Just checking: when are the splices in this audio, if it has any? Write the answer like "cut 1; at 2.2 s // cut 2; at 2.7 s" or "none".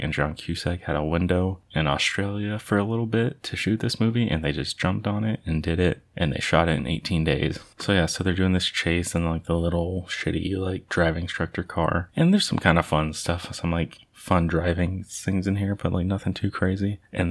none